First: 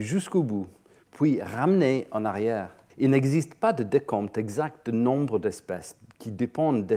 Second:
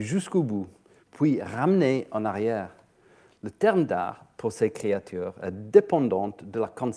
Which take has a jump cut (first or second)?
first